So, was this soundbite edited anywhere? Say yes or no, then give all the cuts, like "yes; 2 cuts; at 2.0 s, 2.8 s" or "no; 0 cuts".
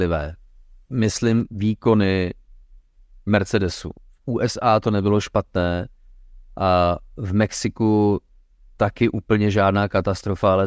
no; 0 cuts